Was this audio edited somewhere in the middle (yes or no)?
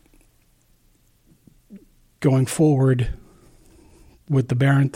no